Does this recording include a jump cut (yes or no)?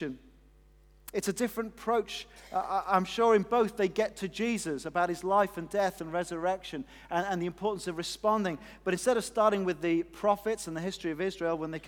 yes